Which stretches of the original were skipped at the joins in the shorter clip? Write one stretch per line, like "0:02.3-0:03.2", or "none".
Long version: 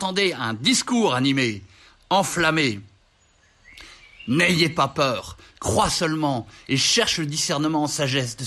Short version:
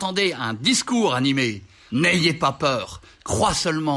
0:01.9-0:04.3